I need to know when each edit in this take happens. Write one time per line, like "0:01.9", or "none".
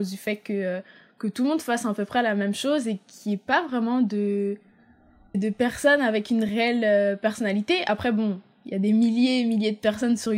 0:05.3